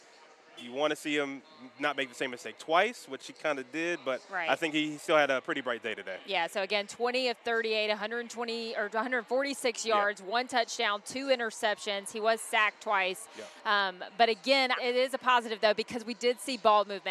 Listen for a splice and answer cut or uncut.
cut